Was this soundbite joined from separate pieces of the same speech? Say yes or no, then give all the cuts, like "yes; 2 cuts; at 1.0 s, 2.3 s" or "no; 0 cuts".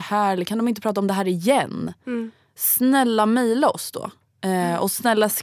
no; 0 cuts